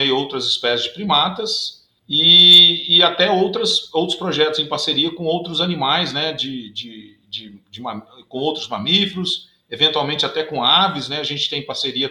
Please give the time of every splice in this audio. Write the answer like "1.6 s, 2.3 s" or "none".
none